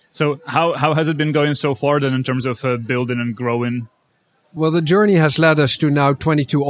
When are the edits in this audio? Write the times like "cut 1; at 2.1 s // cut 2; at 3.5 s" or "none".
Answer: none